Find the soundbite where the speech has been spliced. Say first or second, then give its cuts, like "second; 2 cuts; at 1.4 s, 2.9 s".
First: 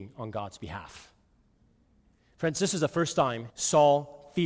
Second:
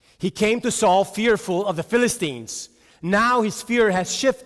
first; 1 cut; at 3.5 s